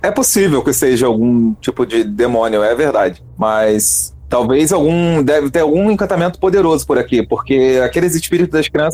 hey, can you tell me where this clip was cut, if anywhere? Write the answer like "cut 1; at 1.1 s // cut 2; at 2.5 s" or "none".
none